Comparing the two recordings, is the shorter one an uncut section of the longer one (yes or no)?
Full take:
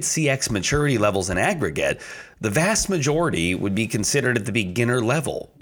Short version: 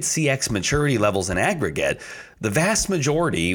yes